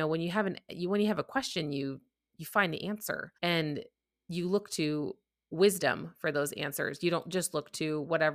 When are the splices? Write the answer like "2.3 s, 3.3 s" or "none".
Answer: 3.4 s